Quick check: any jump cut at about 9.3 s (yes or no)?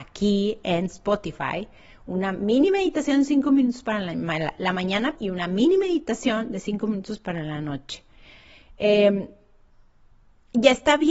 no